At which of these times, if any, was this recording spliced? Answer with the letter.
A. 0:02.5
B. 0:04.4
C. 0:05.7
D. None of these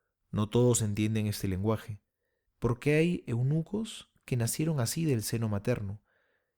A